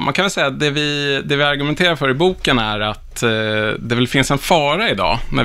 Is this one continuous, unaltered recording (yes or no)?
yes